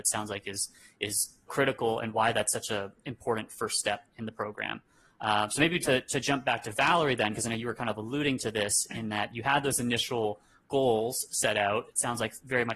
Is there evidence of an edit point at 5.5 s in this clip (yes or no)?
no